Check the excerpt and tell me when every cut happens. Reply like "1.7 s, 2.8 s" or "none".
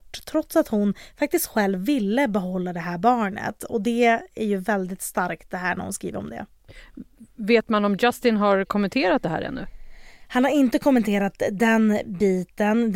none